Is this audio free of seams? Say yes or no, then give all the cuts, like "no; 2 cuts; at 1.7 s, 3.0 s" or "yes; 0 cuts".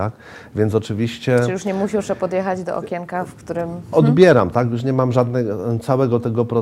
no; 1 cut; at 3.9 s